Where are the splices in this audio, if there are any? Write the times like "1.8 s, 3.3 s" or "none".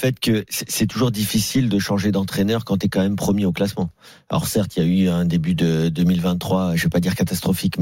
none